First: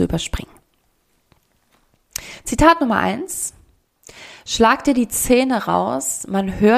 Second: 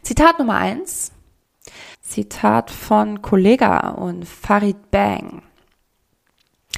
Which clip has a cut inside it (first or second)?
second